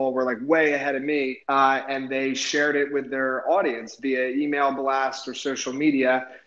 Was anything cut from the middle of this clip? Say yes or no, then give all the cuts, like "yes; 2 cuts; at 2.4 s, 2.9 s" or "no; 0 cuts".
yes; 1 cut; at 1.4 s